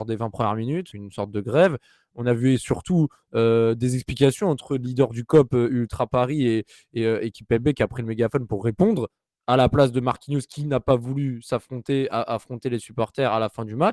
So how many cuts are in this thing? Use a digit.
1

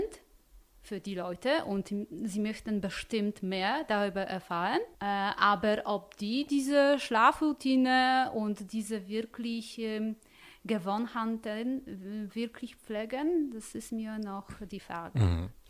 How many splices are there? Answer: 1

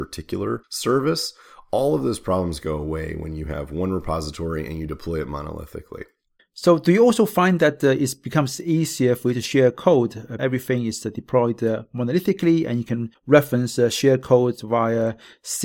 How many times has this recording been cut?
1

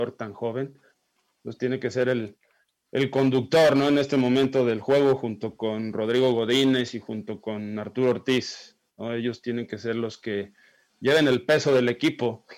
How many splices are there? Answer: 0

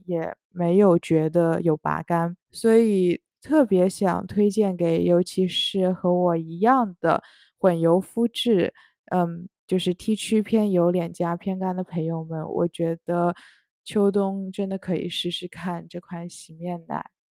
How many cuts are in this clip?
1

